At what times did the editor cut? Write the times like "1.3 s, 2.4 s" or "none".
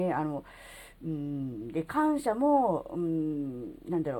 none